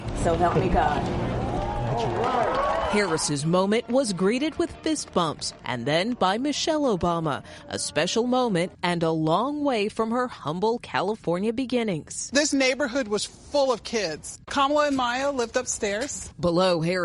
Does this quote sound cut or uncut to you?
cut